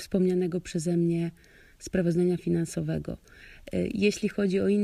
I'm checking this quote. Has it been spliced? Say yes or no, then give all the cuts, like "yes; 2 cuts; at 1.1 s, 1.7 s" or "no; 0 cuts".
no; 0 cuts